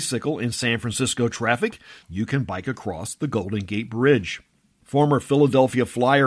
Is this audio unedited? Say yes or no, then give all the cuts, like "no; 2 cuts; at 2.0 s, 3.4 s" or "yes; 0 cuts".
no; 1 cut; at 2.0 s